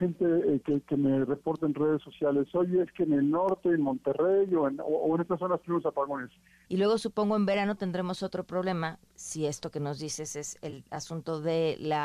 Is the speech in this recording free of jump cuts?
no; 2 cuts; at 6.6 s, 9.1 s

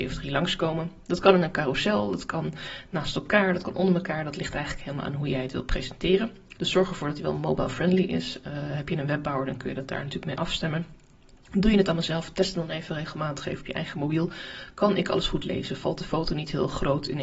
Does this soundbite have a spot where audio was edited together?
yes; 1 cut; at 6.6 s

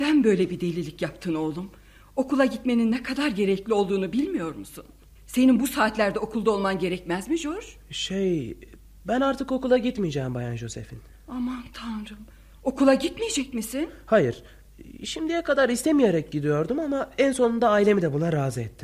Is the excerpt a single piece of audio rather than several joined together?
no; 1 cut; at 5.2 s

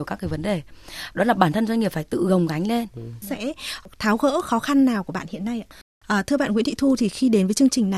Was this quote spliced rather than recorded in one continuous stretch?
yes; 2 cuts; at 3.2 s, 6.0 s

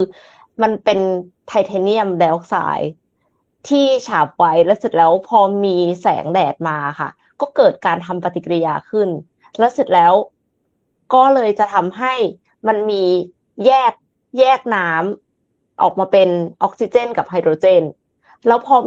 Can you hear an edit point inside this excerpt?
no; 0 cuts

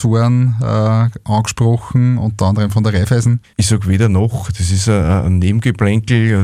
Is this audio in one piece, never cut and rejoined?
no; 1 cut; at 3.4 s

